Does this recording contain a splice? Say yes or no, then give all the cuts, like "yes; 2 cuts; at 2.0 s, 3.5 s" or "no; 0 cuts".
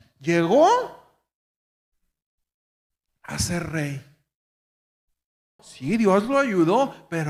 yes; 1 cut; at 5.6 s